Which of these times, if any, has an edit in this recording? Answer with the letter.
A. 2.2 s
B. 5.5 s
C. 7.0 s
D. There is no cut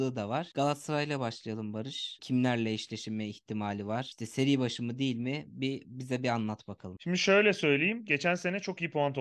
A